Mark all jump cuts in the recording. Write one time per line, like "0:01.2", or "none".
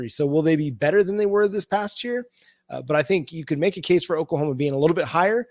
0:02.6

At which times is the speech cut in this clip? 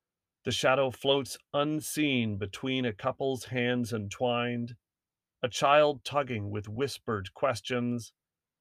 none

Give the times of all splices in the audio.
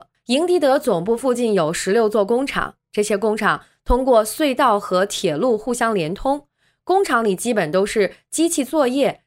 none

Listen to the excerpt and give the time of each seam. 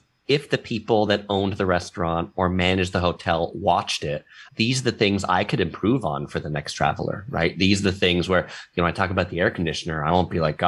0:04.5

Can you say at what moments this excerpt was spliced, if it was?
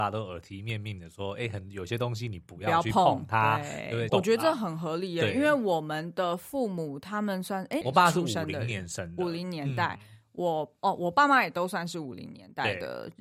0:04.1
0:07.8

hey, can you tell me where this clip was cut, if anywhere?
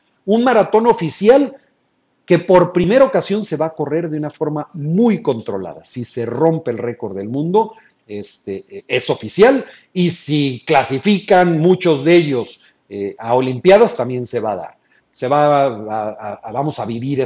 0:13.2
0:15.0

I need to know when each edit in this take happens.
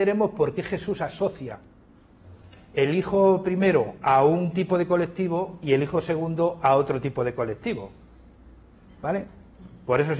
none

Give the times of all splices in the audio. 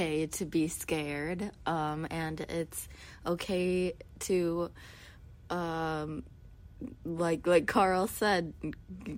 none

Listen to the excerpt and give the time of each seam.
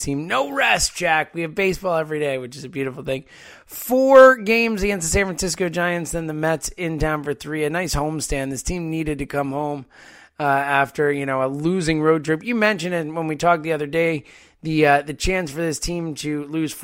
none

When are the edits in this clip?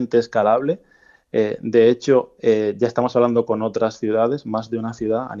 none

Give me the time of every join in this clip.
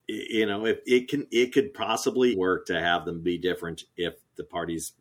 0:02.3

